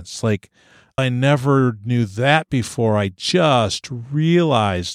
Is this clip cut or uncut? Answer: cut